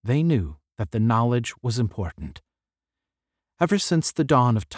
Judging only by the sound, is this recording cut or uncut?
uncut